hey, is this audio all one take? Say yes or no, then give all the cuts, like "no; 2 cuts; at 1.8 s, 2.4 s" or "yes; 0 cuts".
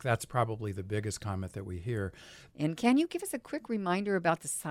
no; 1 cut; at 2.5 s